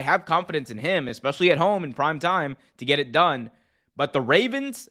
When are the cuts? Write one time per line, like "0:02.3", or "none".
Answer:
none